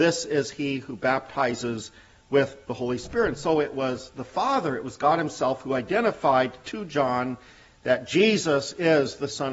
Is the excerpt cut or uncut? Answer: uncut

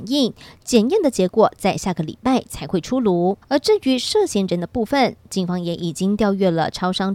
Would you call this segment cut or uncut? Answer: uncut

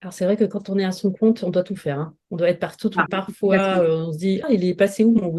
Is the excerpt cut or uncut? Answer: cut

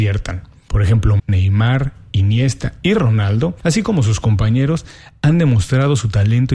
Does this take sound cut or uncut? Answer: cut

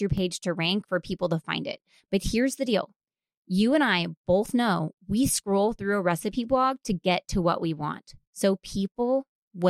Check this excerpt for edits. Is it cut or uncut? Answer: uncut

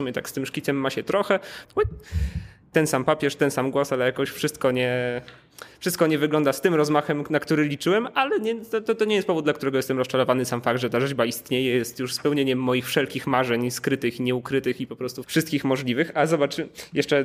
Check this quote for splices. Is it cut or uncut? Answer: cut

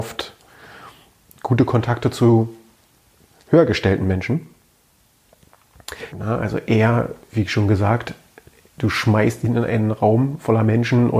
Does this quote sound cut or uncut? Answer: cut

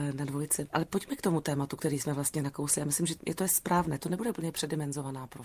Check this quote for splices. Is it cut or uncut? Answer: cut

